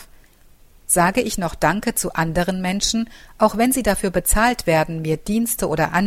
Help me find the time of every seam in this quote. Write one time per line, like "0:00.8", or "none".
none